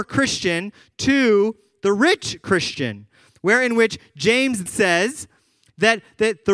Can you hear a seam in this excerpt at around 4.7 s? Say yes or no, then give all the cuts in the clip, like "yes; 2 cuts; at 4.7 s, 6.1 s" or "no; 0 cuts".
yes; 1 cut; at 4.7 s